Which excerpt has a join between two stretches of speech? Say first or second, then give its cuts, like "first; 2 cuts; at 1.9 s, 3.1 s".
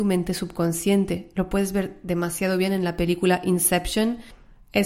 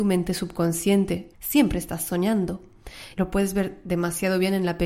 second; 2 cuts; at 1.3 s, 3.1 s